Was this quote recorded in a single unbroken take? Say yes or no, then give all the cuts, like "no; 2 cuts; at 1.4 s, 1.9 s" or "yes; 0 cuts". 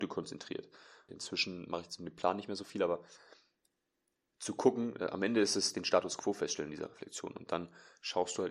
no; 1 cut; at 1.1 s